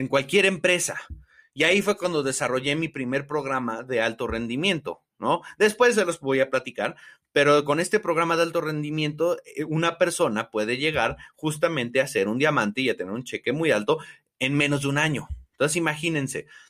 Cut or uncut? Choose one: uncut